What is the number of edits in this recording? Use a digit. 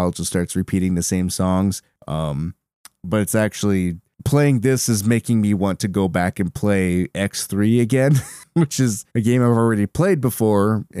1